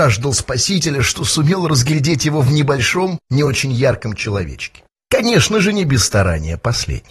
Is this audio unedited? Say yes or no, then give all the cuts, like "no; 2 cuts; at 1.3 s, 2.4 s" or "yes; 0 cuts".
yes; 0 cuts